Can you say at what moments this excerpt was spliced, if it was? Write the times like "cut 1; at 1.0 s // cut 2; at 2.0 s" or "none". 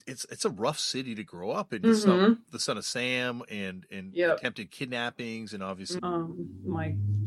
cut 1; at 1.8 s // cut 2; at 6.0 s